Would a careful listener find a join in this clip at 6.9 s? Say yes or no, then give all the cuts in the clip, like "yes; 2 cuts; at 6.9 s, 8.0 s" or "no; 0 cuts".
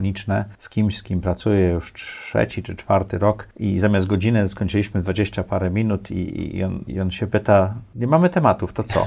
yes; 1 cut; at 6.9 s